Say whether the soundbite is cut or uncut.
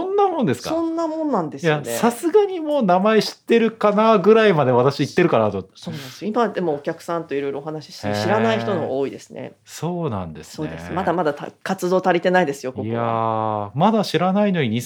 uncut